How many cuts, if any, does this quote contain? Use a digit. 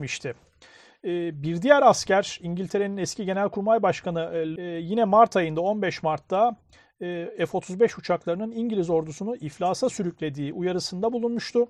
1